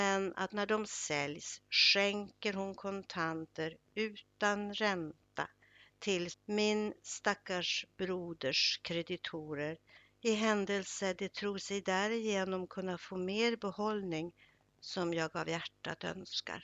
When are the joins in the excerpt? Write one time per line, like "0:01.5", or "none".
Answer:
0:06.3